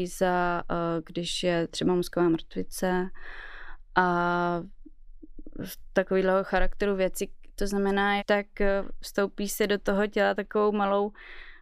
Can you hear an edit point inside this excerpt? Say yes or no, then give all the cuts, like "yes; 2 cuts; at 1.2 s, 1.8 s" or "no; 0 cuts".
yes; 1 cut; at 8.2 s